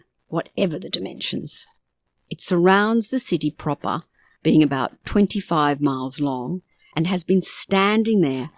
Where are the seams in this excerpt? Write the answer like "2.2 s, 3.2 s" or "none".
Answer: none